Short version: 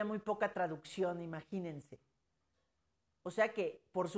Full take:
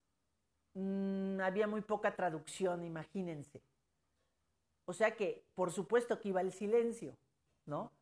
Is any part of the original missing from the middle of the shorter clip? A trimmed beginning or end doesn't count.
no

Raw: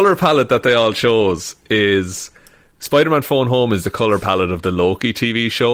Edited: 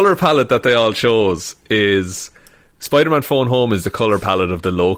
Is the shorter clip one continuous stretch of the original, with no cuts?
yes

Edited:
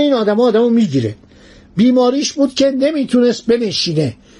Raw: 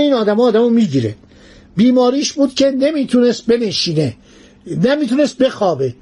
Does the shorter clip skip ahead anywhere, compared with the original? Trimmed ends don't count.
no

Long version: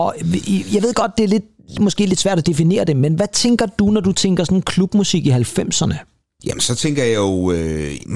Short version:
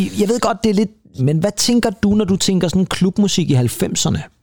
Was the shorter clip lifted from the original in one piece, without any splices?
no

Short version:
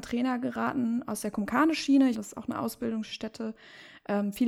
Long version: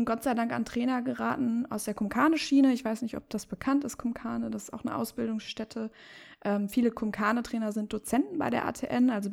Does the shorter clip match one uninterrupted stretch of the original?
no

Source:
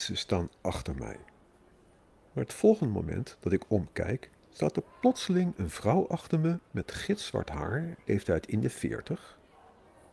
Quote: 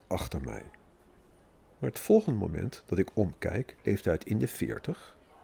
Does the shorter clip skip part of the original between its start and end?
yes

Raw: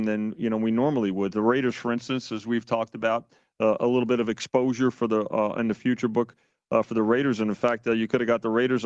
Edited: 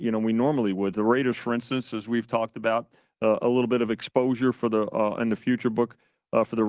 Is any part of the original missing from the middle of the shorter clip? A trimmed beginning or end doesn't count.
no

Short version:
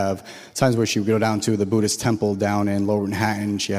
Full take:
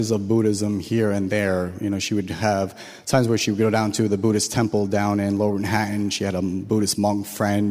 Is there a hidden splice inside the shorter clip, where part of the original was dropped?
no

